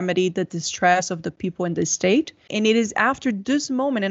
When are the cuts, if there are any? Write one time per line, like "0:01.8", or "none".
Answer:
0:02.5